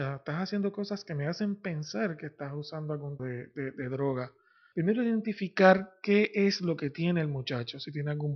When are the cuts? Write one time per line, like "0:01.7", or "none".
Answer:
0:03.2
0:04.7